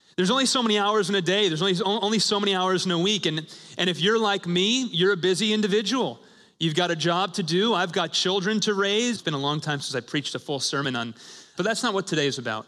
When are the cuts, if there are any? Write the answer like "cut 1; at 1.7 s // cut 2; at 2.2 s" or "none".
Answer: cut 1; at 9.1 s // cut 2; at 11.6 s